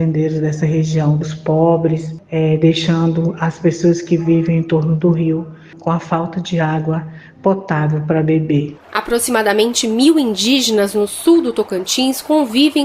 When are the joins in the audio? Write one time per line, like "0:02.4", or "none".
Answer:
0:01.2